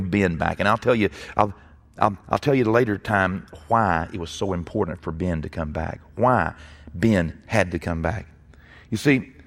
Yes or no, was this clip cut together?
no